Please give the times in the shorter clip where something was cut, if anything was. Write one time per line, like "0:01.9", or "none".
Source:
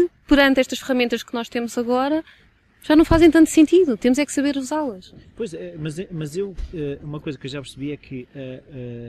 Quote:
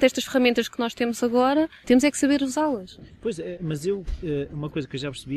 0:01.8
0:03.6

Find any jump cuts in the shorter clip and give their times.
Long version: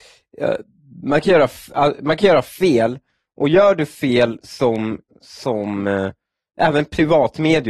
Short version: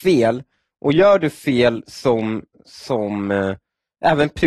none

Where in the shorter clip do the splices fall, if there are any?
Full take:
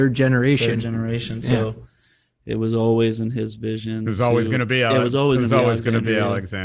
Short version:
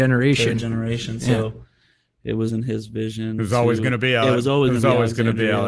0:02.5

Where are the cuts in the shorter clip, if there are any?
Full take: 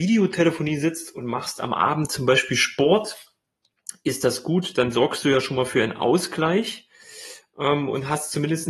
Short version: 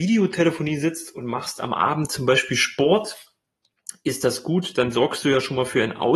none

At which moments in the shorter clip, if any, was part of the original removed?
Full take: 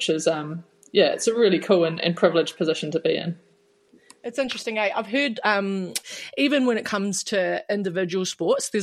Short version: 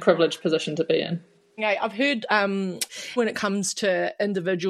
0:01.6
0:03.2

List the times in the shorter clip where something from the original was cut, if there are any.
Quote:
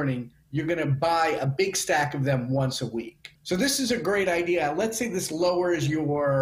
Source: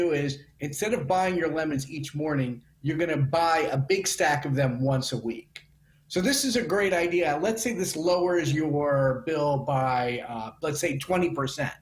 0:03.4

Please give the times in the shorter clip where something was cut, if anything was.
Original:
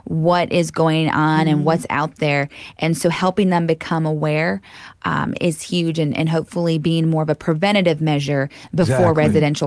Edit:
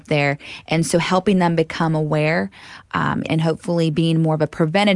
0:03.3

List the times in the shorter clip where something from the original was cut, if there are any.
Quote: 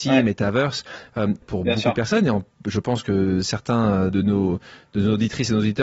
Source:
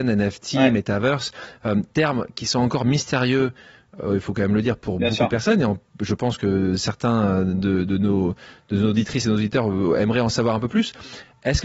0:01.4
0:04.1

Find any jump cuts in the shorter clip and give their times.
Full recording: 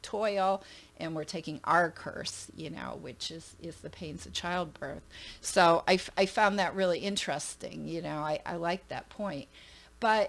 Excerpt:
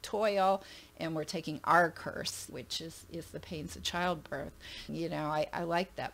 0:02.5
0:04.9

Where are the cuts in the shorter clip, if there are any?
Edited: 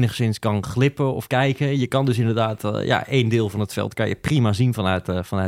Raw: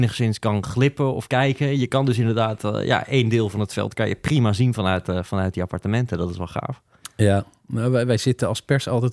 none

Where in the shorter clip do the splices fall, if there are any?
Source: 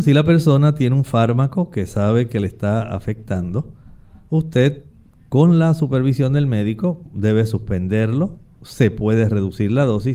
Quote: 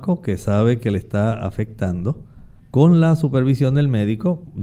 0:02.6

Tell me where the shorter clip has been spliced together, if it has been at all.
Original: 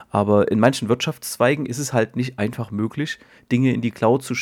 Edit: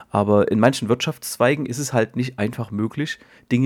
none

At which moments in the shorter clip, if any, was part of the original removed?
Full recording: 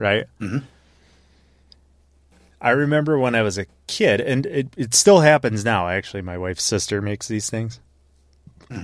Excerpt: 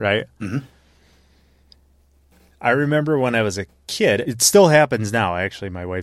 0:04.2

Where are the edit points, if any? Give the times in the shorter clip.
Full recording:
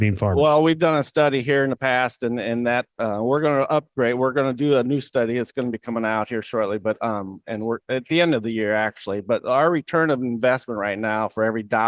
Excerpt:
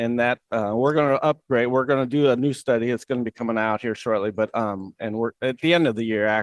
none

